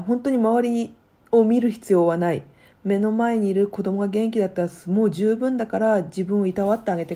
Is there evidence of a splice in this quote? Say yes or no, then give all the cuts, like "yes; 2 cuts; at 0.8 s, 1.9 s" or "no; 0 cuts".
no; 0 cuts